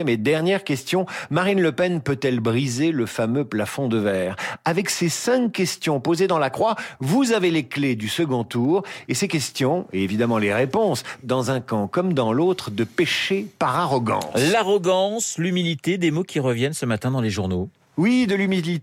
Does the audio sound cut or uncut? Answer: cut